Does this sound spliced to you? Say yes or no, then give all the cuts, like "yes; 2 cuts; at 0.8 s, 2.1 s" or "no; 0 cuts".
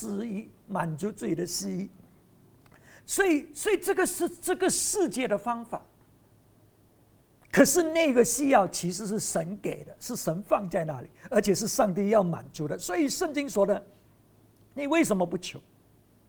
yes; 1 cut; at 3.0 s